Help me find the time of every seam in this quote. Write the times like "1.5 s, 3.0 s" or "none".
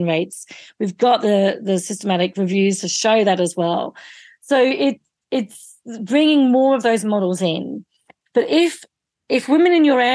8.3 s